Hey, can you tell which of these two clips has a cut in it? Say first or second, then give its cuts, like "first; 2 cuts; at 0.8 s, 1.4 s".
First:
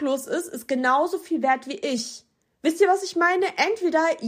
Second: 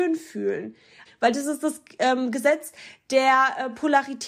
second; 1 cut; at 1.0 s